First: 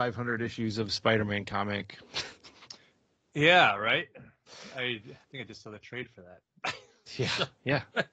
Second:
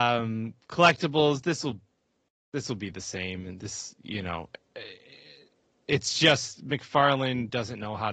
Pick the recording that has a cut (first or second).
first